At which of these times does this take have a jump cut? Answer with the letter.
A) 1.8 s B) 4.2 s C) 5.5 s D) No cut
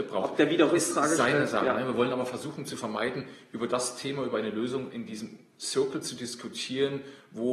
D